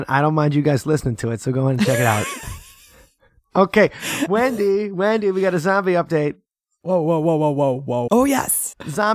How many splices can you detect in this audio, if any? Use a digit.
1